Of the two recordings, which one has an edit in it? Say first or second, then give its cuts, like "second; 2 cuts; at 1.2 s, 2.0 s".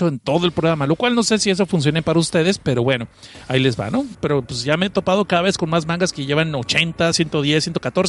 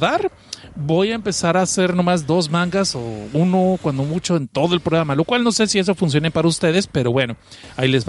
first; 2 cuts; at 4.1 s, 7.1 s